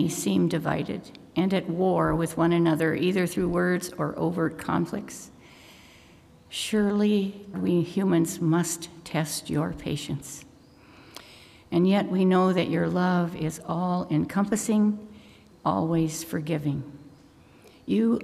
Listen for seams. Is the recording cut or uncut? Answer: cut